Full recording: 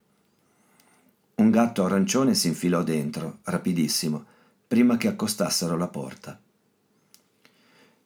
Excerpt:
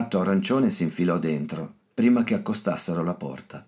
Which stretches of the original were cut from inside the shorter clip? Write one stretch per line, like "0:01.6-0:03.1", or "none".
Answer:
0:03.4-0:04.5